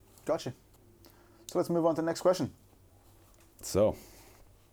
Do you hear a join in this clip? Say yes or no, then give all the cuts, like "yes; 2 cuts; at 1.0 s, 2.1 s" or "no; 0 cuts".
no; 0 cuts